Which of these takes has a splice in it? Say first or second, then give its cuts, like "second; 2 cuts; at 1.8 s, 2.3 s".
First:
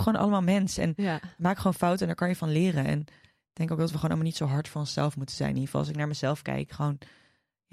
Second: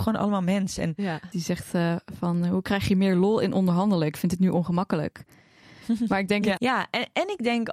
second; 2 cuts; at 1.3 s, 6.6 s